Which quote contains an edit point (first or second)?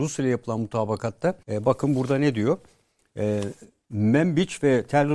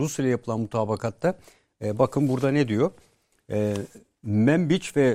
first